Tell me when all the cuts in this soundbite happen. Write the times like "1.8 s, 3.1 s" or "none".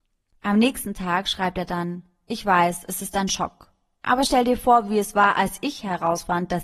none